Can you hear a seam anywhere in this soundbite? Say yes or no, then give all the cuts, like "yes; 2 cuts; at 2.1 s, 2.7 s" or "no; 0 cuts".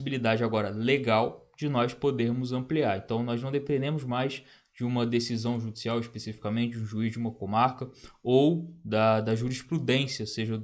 no; 0 cuts